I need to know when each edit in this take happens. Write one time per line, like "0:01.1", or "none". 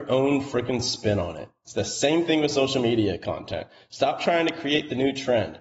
none